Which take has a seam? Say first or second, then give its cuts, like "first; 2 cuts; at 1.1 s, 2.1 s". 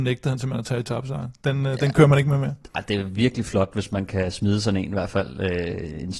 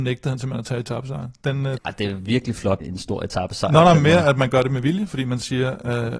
second; 2 cuts; at 1.8 s, 2.8 s